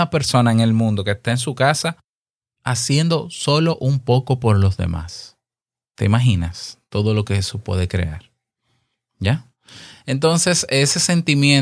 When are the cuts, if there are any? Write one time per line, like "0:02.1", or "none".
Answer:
none